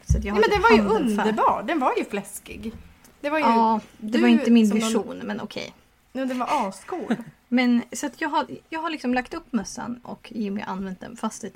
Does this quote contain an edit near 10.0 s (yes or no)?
yes